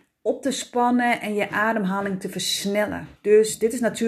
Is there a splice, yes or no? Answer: yes